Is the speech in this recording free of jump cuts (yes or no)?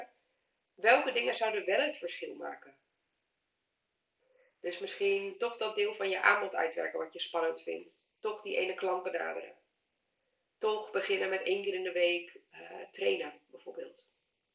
yes